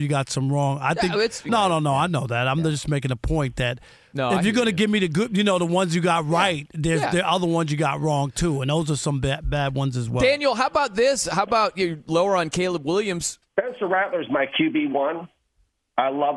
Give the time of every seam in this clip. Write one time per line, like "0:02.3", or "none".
0:01.5
0:13.5